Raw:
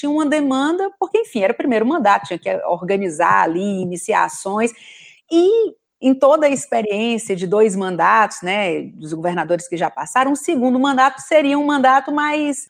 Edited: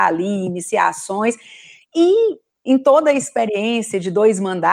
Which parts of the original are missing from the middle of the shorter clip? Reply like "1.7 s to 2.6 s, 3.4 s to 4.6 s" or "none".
none